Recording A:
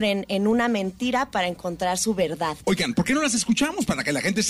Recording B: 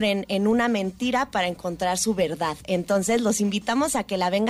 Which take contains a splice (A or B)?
A